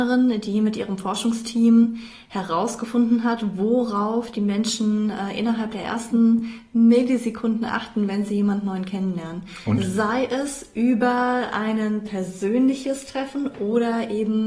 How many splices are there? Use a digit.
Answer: 0